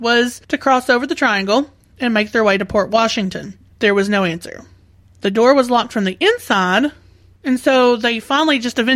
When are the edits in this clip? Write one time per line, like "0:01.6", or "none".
0:03.7